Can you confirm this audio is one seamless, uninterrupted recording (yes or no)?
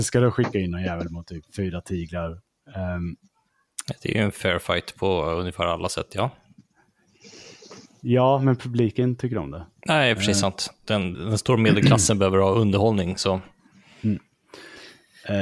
no